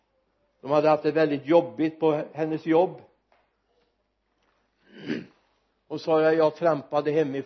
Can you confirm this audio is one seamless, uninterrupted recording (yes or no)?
yes